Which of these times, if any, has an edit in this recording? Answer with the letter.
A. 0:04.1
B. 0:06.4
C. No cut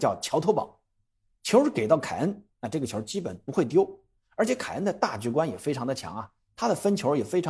C